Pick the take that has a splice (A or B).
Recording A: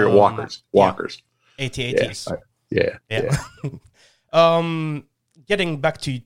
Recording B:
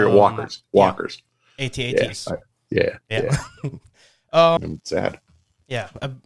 B